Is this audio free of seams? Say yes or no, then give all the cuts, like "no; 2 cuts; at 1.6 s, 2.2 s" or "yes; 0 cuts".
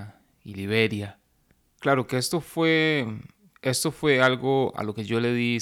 no; 1 cut; at 1.7 s